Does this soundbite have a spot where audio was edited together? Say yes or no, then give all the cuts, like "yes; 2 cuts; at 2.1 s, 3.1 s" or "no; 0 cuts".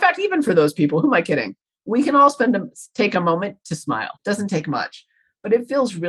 yes; 1 cut; at 4.2 s